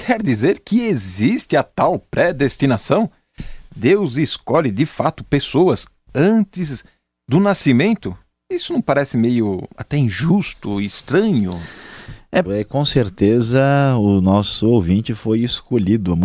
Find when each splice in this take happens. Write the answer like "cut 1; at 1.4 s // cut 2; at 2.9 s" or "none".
cut 1; at 12.4 s